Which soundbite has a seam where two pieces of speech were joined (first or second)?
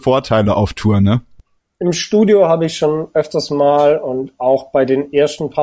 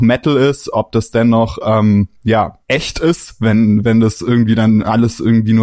second